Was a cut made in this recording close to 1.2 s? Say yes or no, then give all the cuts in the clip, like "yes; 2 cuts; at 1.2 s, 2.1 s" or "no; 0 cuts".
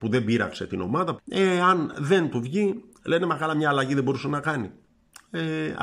yes; 1 cut; at 1.2 s